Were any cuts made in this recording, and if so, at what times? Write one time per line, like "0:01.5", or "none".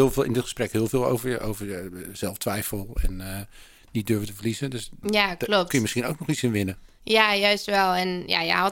0:05.0

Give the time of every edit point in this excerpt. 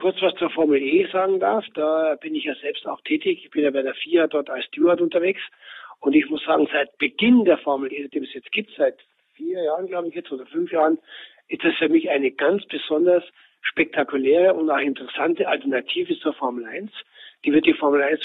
none

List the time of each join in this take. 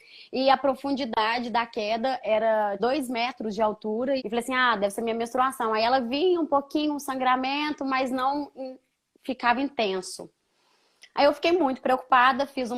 0:02.8
0:04.2

